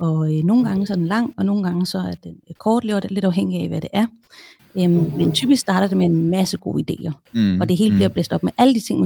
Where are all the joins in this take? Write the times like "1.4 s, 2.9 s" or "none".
none